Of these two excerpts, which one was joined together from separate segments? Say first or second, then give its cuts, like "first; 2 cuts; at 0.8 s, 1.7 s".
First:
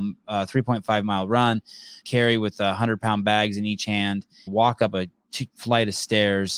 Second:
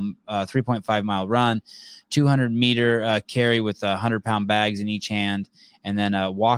first; 2 cuts; at 2.0 s, 4.5 s